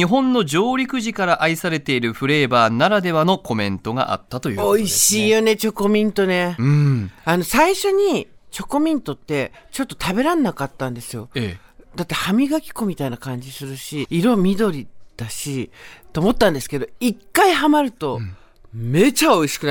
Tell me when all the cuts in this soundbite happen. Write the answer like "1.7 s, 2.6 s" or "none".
14.0 s